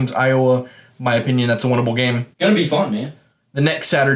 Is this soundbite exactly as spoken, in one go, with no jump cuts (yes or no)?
no